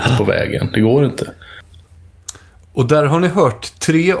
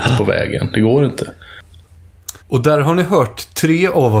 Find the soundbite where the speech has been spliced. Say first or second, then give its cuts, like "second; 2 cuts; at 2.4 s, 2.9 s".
second; 1 cut; at 2.4 s